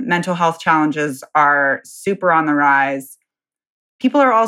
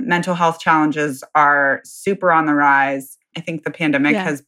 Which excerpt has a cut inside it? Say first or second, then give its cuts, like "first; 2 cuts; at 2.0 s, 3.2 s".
second; 1 cut; at 3.3 s